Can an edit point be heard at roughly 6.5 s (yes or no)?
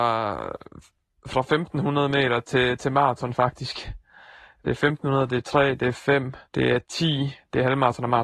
yes